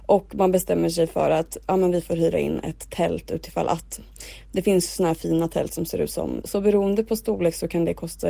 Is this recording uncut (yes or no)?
no